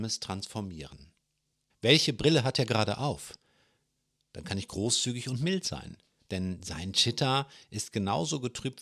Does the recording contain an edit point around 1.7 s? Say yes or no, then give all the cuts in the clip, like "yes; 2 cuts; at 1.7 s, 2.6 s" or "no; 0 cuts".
yes; 1 cut; at 1.7 s